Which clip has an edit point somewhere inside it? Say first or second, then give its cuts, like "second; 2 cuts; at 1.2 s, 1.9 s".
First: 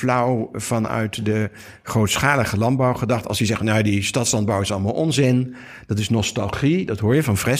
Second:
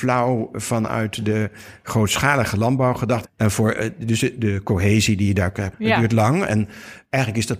second; 2 cuts; at 3.2 s, 5.7 s